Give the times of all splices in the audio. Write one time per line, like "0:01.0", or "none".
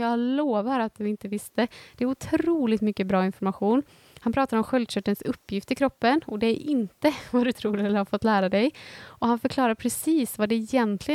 none